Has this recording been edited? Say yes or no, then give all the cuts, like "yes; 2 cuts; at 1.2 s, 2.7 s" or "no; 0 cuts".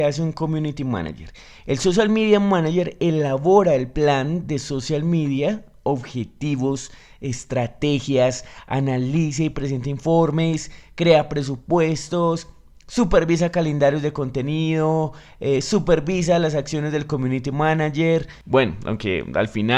no; 0 cuts